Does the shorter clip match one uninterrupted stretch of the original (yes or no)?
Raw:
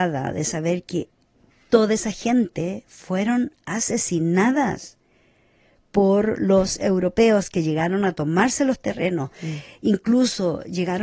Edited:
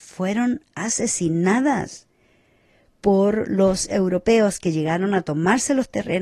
yes